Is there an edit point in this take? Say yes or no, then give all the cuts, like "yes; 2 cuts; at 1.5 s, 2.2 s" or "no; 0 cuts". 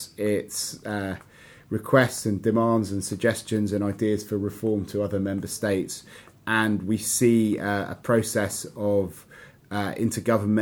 no; 0 cuts